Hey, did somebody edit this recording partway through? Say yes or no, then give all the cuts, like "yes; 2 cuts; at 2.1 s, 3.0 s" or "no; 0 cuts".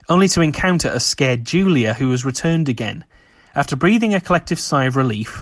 no; 0 cuts